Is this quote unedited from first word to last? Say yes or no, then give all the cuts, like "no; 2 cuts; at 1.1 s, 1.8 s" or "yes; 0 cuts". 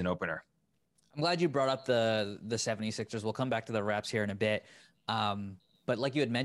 yes; 0 cuts